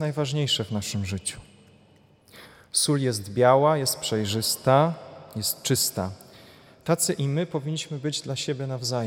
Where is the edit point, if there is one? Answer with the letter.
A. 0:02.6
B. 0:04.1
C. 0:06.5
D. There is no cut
D